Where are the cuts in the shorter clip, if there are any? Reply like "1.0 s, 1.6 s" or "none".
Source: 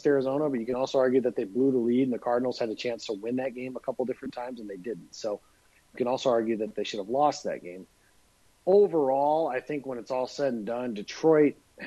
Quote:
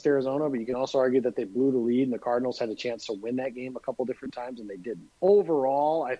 5.1 s